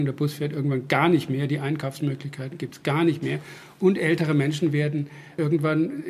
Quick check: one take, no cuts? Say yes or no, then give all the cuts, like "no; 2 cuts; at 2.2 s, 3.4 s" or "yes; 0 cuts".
yes; 0 cuts